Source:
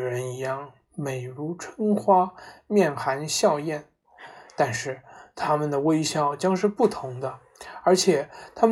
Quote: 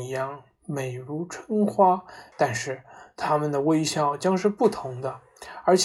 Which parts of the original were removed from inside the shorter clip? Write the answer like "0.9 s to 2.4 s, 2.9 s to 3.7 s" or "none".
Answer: 2.6 s to 4.5 s